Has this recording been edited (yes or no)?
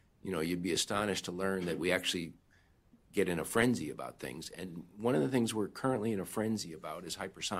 no